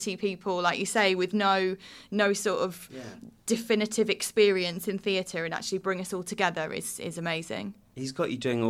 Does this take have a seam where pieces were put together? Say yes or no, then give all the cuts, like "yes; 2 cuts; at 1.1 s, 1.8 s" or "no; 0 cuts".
no; 0 cuts